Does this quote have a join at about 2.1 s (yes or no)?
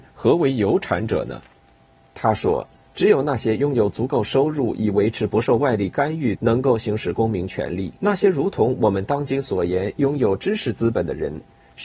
no